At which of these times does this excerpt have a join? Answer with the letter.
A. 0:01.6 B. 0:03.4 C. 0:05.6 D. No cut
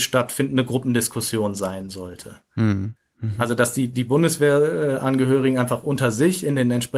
D